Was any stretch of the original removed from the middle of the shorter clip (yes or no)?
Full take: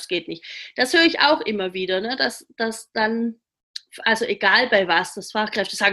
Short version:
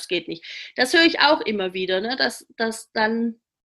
no